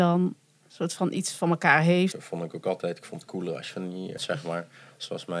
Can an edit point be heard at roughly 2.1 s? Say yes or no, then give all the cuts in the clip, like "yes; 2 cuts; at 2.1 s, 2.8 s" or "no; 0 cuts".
yes; 2 cuts; at 2.1 s, 4.2 s